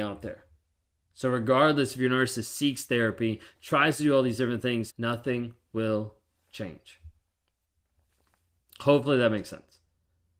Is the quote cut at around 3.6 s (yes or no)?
yes